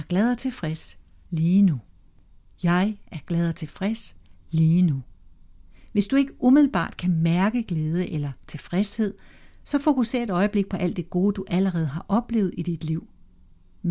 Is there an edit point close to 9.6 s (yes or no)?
no